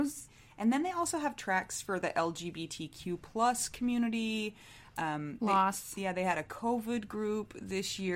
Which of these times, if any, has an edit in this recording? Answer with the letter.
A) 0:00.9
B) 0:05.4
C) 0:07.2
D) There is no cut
B